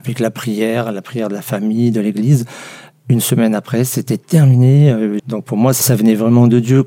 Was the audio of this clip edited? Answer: yes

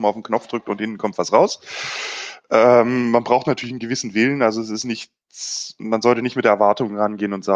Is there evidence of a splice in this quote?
no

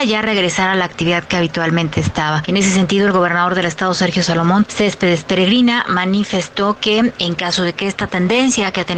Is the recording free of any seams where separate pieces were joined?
yes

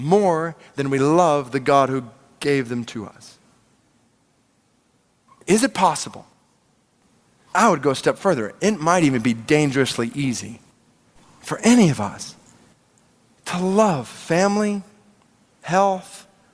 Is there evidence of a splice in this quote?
no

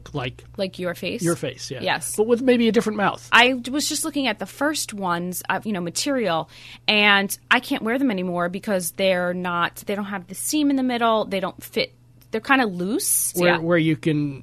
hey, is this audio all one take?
no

